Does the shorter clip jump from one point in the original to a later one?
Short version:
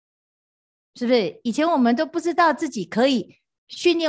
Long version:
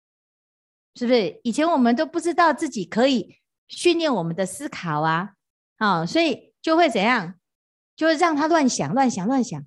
no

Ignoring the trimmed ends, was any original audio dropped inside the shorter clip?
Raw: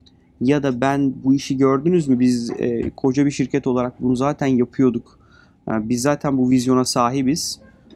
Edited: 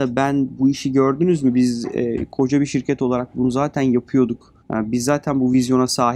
yes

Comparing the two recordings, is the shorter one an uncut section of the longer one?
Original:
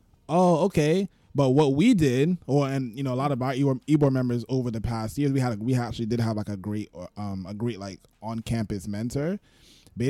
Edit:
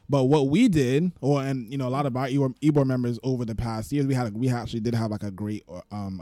yes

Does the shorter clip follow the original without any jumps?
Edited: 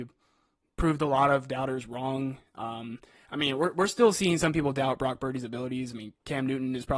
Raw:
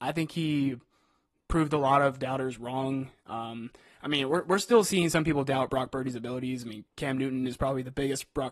yes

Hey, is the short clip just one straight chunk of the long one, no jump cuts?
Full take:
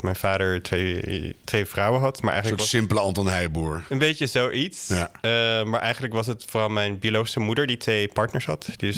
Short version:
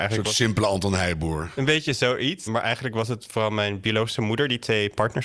no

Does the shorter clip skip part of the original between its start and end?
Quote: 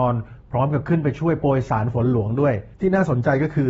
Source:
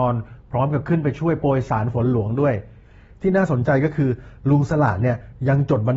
yes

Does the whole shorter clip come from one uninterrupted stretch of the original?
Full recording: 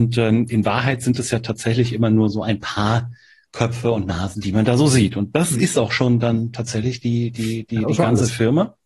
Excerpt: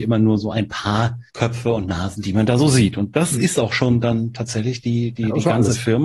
no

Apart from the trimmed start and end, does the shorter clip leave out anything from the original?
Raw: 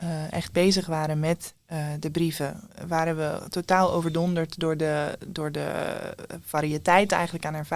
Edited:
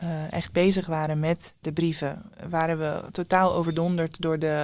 yes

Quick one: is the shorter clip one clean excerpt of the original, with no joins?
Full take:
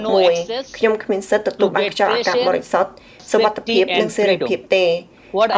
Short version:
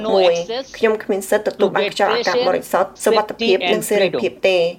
no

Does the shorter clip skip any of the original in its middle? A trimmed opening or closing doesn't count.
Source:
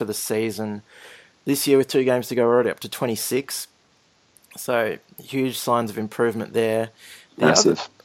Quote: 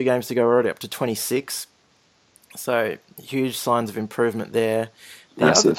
no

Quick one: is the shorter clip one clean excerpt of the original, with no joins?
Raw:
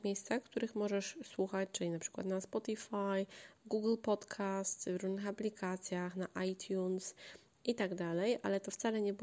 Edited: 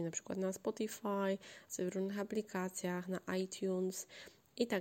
no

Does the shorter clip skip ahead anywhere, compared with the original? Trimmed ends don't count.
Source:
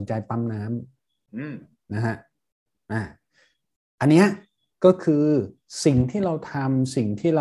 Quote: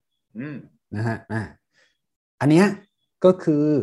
yes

